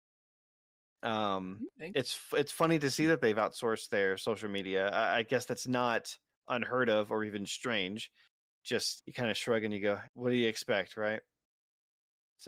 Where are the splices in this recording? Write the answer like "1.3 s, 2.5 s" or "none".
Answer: 9.0 s, 10.0 s